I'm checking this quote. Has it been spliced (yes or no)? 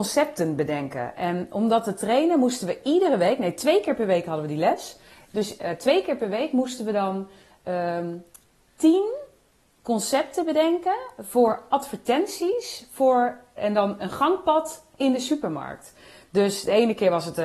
no